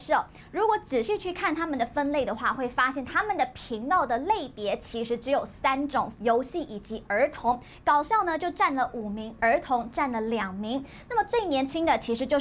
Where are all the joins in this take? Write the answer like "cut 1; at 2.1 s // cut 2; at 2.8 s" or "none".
cut 1; at 6.1 s // cut 2; at 9.4 s